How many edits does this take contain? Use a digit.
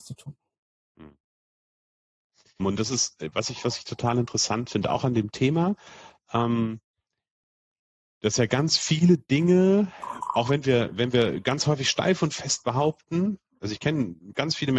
1